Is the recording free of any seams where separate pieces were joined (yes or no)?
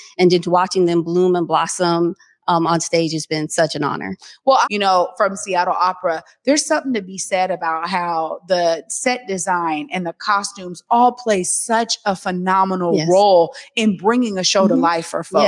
no